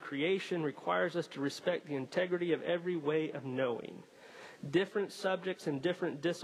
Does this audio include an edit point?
no; 0 cuts

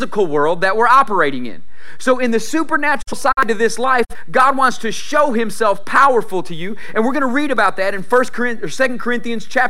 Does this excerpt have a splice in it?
no; 0 cuts

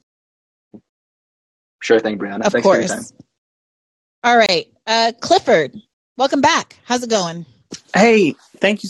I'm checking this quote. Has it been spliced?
no; 0 cuts

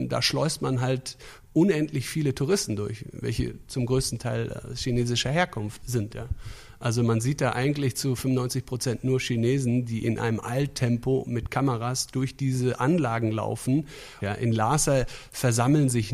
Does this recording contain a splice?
yes; 1 cut; at 14.2 s

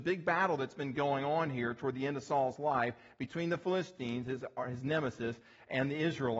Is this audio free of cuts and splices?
yes; 0 cuts

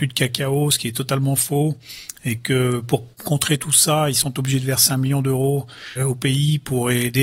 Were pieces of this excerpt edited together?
no; 0 cuts

